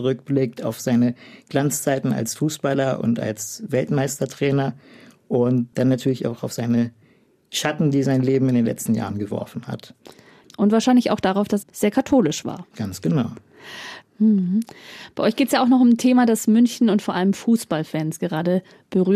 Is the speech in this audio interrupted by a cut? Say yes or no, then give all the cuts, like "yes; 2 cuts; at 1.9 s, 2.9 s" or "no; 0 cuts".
yes; 2 cuts; at 11.6 s, 14.0 s